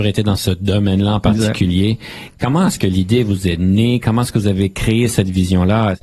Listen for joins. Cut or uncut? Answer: uncut